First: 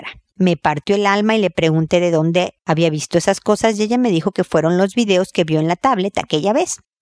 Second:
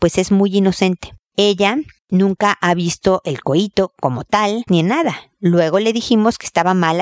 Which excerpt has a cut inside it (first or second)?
second